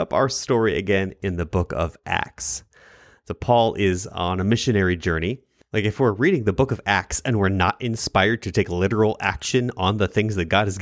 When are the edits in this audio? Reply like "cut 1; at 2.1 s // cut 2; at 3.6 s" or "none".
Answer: cut 1; at 5.6 s